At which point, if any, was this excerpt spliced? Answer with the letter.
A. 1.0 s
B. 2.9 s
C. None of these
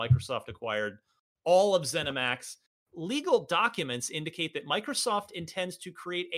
B